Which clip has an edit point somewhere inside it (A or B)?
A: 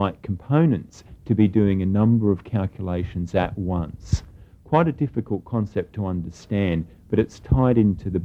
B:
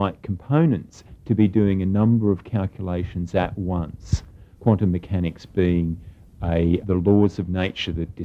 B